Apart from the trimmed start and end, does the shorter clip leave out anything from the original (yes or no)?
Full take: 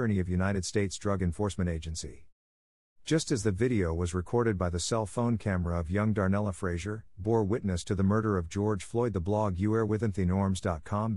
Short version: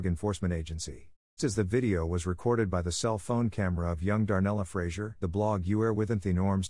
yes